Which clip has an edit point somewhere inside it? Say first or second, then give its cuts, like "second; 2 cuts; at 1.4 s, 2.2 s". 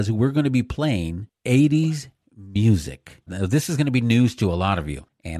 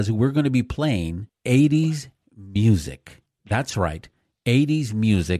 first; 1 cut; at 3.3 s